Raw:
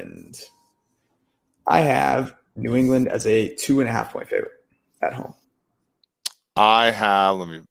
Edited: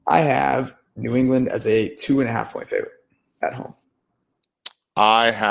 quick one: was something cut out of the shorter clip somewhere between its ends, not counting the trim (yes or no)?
no